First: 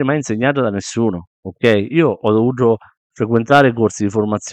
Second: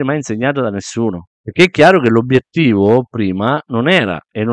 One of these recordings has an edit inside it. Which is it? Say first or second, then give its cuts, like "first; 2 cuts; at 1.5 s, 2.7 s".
second; 1 cut; at 1.3 s